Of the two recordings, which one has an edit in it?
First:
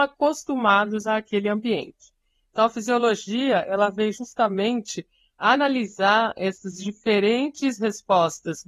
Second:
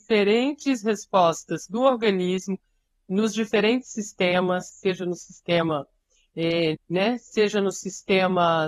second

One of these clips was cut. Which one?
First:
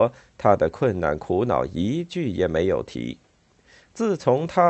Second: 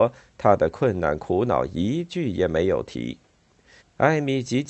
second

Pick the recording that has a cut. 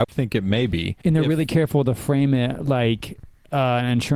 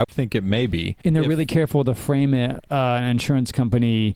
second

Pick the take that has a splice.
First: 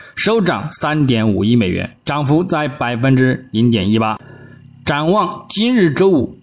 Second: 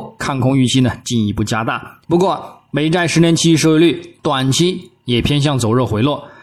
second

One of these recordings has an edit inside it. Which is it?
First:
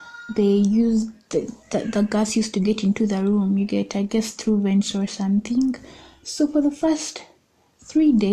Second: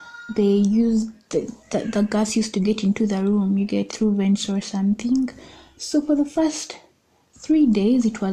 second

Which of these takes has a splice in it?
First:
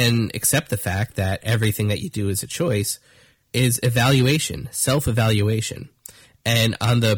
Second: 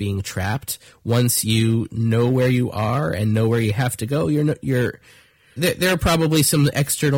second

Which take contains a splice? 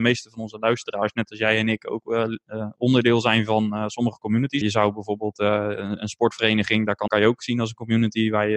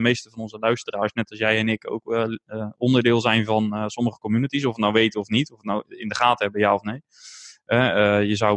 first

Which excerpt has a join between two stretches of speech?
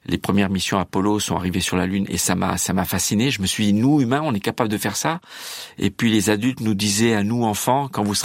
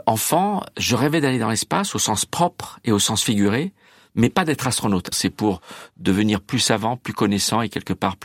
second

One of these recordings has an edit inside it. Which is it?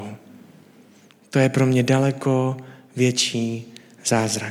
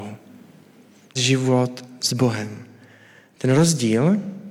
second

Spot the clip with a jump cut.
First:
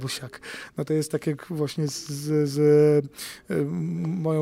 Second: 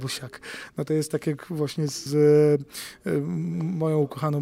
second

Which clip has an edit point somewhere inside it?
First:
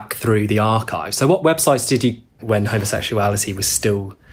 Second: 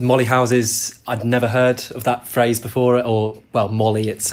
first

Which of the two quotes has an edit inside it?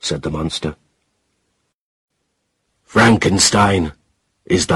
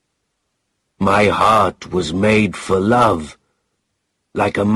first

